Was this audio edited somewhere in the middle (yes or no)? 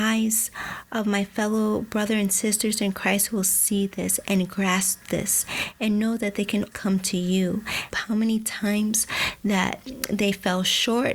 yes